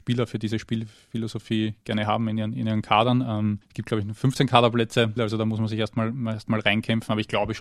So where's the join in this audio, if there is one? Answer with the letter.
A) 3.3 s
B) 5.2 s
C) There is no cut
B